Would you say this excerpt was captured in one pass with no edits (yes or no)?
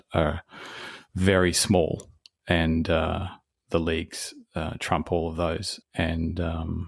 no